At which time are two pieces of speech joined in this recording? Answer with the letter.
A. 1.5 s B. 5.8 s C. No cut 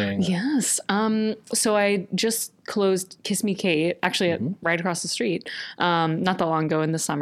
A